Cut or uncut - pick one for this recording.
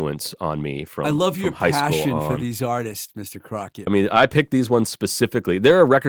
cut